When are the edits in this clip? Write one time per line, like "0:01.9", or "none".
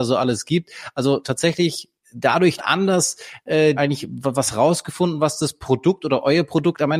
0:02.6
0:03.8

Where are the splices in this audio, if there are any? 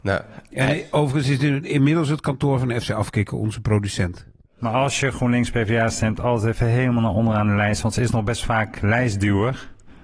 none

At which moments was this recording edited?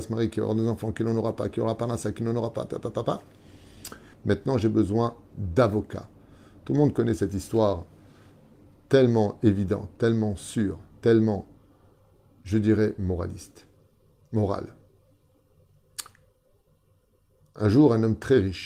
0:04.1

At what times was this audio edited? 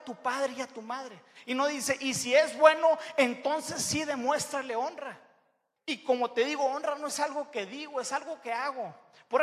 0:05.8

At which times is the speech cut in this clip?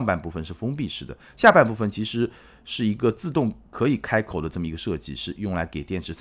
none

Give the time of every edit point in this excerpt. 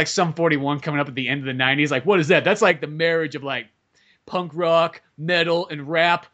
none

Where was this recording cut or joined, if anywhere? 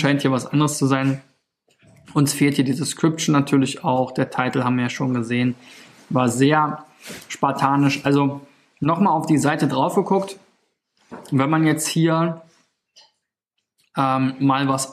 none

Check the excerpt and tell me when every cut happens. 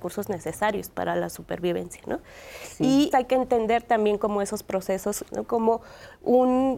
0:03.1
0:05.3

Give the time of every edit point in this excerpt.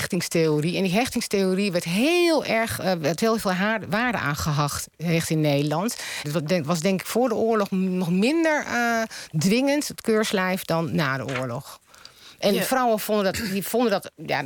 0:06.2

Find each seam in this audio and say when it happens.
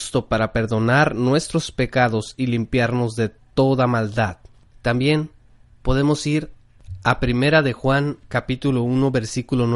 0:04.7

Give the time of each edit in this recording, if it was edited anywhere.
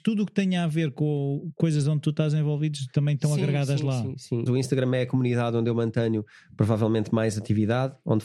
0:04.5

